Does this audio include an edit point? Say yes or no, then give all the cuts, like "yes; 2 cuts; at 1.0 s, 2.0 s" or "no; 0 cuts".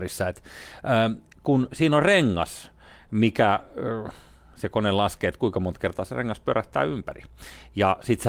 no; 0 cuts